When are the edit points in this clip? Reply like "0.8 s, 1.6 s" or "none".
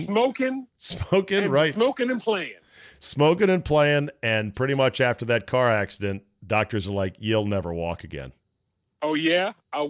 none